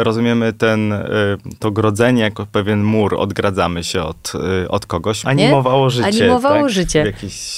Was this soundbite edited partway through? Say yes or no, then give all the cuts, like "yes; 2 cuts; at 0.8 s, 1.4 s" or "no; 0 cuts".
yes; 1 cut; at 5.2 s